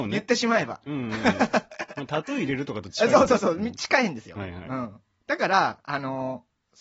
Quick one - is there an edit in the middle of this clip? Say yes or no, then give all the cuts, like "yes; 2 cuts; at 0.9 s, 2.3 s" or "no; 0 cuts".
no; 0 cuts